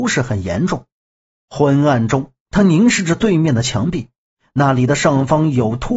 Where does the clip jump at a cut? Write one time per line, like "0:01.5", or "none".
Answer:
0:01.4